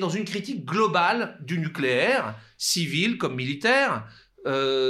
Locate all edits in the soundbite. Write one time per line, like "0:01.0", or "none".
none